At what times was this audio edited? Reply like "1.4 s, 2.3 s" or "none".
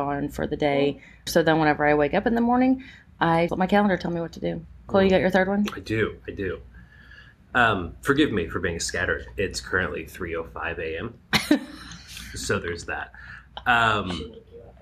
1.3 s, 3.5 s